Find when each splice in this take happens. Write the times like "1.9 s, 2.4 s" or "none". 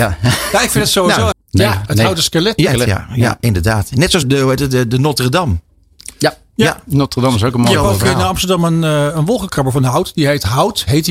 1.3 s, 2.7 s, 4.2 s